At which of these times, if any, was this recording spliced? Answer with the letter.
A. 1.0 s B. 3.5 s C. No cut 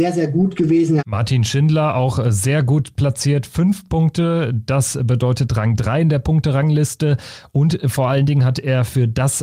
A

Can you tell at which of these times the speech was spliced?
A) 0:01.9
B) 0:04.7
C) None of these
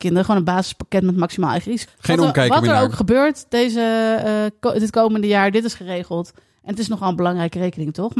A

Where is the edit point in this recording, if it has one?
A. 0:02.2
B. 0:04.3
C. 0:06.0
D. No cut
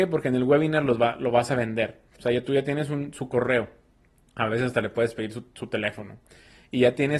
A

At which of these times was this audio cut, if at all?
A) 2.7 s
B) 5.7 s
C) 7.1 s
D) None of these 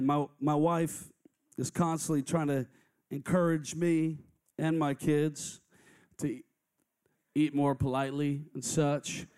C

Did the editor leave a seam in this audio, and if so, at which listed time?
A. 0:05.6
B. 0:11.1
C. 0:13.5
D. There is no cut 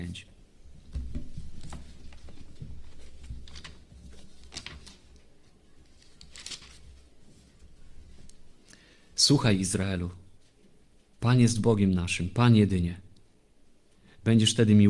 D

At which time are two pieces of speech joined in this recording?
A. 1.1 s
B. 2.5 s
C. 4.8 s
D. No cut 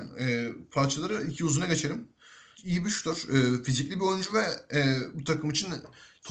B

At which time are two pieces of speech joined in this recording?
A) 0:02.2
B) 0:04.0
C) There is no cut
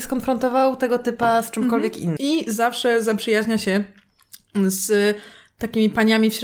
A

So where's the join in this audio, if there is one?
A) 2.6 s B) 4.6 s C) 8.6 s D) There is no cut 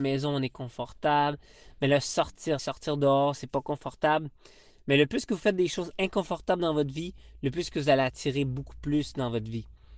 A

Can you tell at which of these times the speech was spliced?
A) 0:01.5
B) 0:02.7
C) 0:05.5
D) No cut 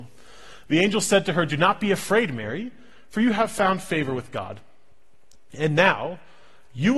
D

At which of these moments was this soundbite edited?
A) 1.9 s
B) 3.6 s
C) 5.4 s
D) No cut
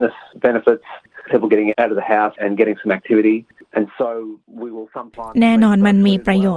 B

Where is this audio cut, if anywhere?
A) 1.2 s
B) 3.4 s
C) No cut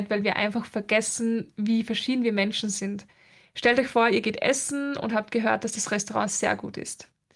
B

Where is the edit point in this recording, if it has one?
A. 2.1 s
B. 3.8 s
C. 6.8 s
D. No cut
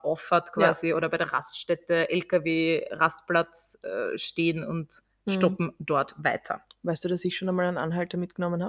D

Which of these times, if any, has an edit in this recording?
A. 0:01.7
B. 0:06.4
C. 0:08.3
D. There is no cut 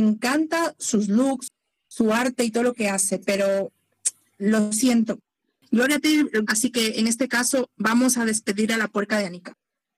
B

